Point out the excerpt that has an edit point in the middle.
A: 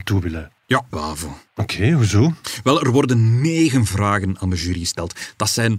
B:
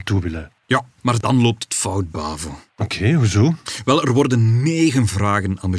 A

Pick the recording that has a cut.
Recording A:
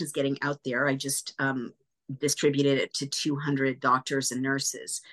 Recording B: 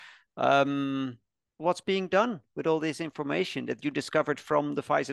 B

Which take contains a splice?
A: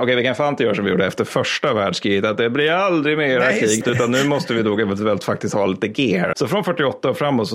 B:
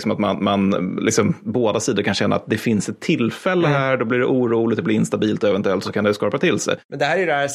A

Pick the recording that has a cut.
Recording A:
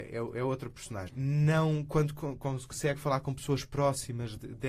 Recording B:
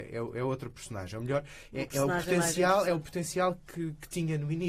A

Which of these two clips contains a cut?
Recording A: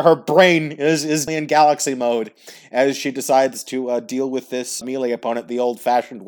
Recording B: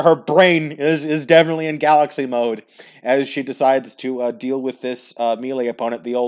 A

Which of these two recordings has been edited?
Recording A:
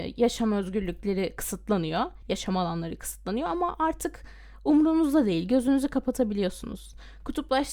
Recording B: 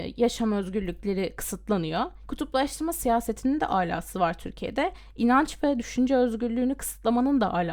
B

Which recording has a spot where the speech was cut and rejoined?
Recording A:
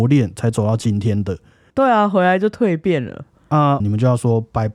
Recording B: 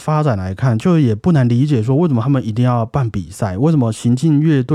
A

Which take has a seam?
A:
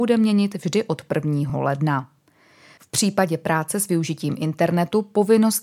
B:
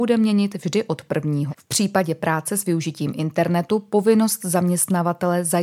B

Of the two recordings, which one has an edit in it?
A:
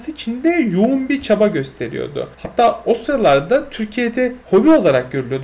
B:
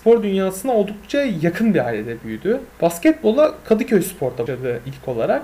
B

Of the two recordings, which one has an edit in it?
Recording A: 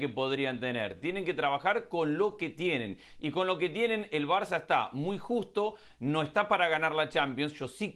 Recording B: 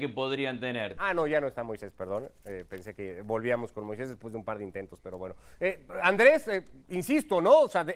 B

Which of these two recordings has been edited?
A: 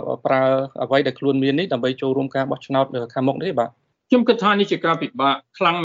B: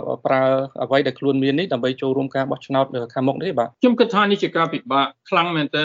B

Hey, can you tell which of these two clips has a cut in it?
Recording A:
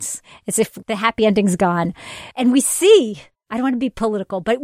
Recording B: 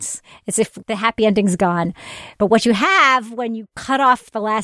A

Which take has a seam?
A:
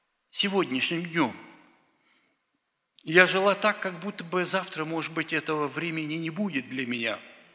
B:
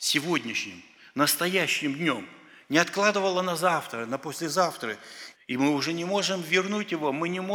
B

